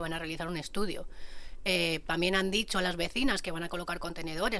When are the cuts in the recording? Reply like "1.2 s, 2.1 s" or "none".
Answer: none